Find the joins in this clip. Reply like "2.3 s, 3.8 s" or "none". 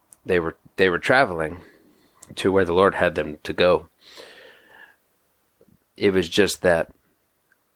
none